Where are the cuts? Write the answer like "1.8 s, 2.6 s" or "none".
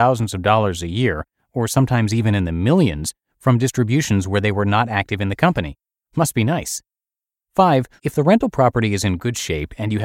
8.0 s

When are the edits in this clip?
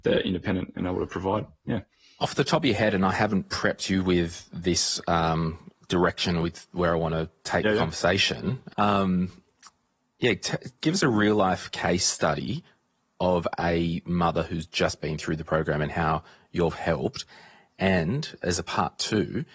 8.7 s

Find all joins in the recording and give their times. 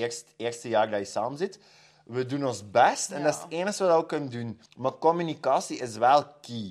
1.9 s, 4.7 s

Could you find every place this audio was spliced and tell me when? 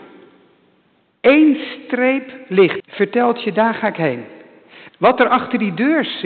2.8 s, 4.9 s

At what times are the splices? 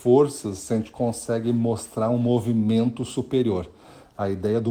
none

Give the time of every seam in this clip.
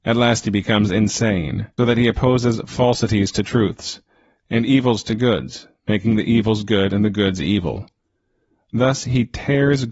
1.8 s, 4.4 s

